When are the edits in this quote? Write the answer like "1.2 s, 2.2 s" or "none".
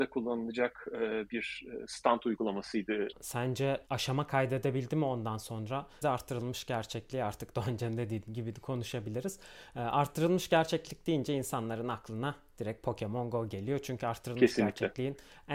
3.1 s, 6.0 s